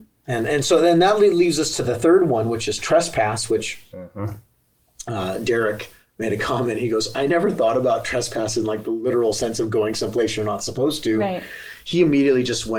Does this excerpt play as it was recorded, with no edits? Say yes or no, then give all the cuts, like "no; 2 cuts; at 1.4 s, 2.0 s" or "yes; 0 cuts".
yes; 0 cuts